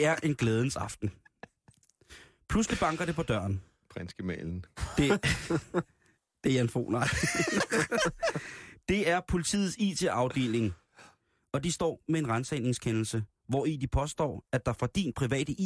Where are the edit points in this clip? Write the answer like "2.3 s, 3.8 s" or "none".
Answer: none